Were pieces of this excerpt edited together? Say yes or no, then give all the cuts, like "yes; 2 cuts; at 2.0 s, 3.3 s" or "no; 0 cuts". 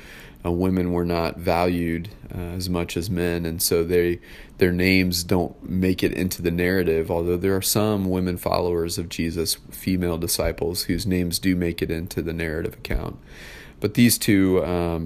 no; 0 cuts